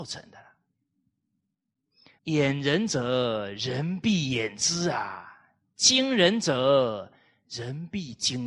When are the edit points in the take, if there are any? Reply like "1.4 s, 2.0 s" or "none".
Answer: 2.2 s